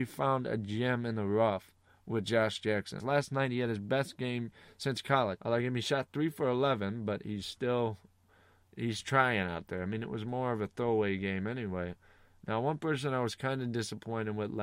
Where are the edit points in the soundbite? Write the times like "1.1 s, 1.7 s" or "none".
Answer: 3.0 s, 5.4 s